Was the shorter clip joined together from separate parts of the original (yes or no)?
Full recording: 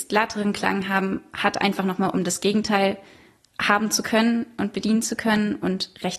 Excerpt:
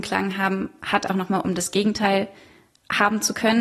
yes